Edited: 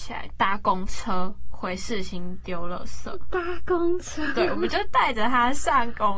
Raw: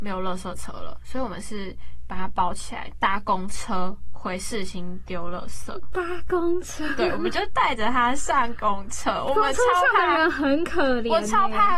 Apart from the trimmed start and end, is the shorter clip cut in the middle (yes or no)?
no